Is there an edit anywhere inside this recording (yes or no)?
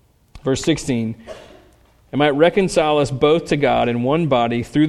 no